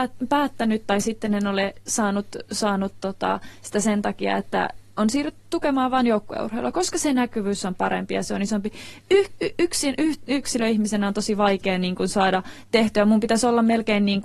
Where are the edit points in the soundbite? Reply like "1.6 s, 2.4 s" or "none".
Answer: none